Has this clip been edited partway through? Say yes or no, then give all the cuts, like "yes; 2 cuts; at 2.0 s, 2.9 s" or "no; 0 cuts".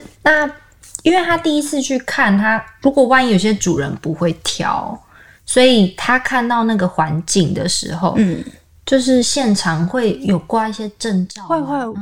no; 0 cuts